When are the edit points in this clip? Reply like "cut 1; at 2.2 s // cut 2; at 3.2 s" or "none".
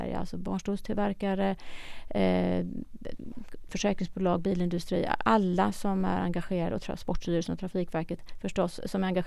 cut 1; at 3.7 s

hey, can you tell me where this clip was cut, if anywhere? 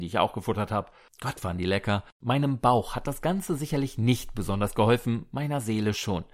cut 1; at 2.1 s

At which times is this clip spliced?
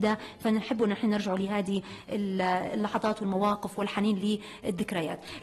none

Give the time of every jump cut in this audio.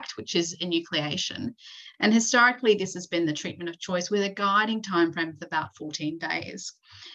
none

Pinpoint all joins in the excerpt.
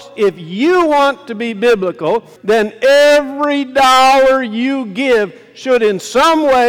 cut 1; at 2.4 s

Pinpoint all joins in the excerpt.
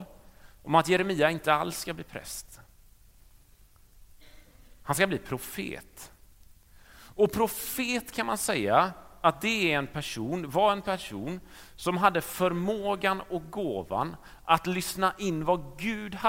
none

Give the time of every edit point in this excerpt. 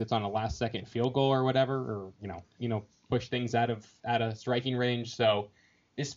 cut 1; at 2.5 s

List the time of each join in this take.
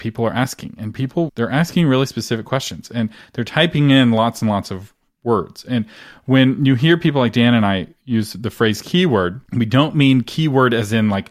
cut 1; at 1.3 s // cut 2; at 9.4 s

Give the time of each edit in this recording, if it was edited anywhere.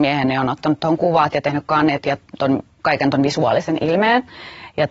cut 1; at 2.7 s

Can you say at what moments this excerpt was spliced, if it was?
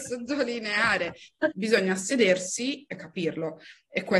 cut 1; at 1.5 s

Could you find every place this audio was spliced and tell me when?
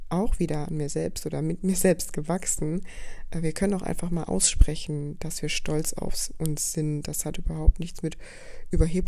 none

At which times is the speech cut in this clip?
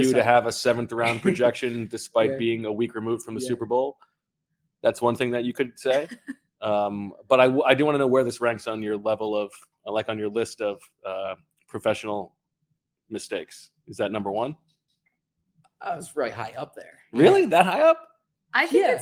none

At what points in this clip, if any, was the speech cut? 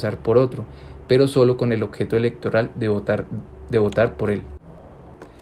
none

